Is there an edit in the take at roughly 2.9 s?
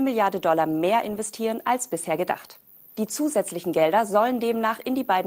yes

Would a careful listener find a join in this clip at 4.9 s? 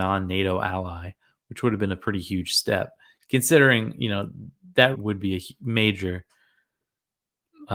yes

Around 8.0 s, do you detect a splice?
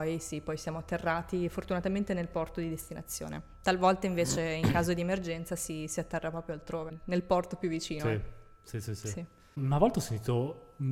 no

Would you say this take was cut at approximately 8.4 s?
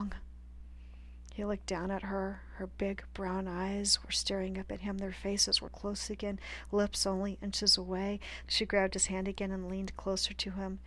yes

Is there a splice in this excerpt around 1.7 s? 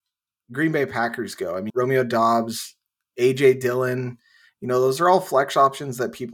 yes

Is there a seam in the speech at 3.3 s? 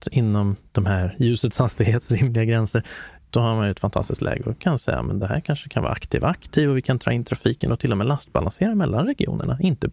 yes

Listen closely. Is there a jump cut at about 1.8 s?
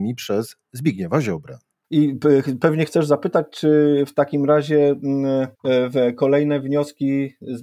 yes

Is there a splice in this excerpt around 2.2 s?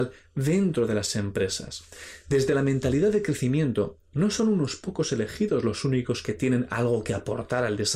no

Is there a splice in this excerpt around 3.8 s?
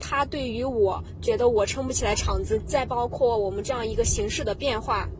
no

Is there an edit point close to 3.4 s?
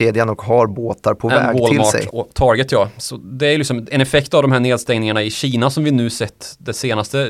no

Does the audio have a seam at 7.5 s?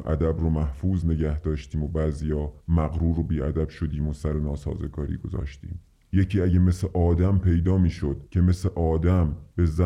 no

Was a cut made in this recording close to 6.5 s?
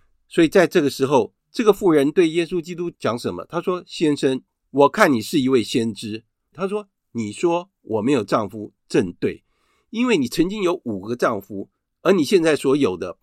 yes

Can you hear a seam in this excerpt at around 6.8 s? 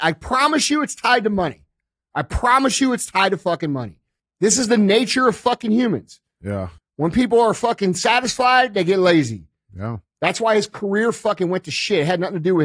yes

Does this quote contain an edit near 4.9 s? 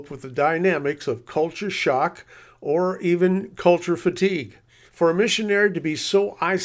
yes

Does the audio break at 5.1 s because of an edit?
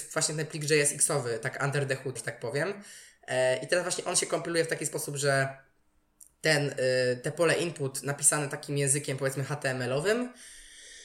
no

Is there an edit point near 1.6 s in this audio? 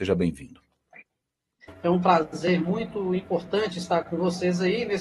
yes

